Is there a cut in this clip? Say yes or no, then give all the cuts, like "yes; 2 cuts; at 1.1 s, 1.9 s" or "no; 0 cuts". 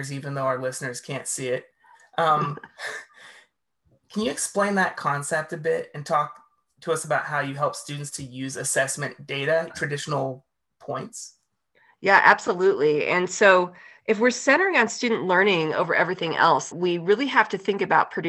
yes; 2 cuts; at 9.7 s, 16.7 s